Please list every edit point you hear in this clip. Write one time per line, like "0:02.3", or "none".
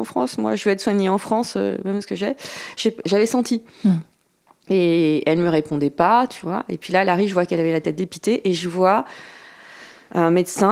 0:03.0